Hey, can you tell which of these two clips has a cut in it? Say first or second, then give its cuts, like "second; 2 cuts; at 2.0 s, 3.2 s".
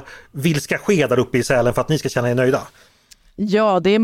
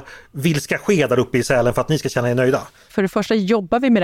second; 1 cut; at 2.9 s